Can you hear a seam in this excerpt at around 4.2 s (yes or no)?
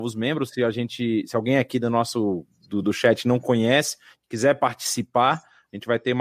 no